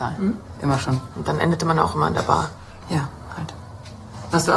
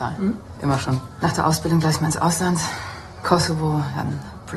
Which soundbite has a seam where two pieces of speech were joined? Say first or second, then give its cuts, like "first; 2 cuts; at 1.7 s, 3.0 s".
first; 2 cuts; at 1.1 s, 2.8 s